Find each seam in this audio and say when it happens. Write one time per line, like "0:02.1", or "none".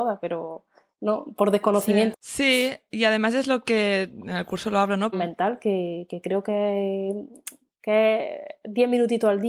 0:02.1
0:05.1